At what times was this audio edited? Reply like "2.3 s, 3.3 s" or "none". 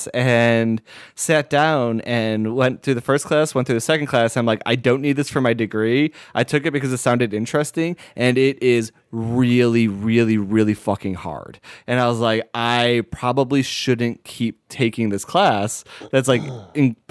none